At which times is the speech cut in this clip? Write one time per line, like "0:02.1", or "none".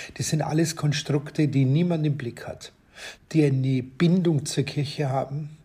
0:03.1